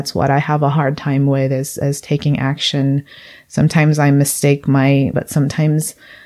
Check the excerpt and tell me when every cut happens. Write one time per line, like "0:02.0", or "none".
0:05.1

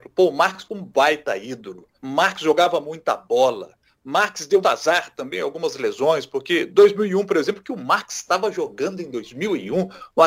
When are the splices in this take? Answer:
0:01.9
0:04.6

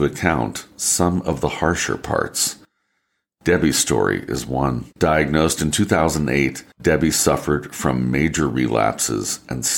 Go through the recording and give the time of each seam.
0:04.9
0:06.7

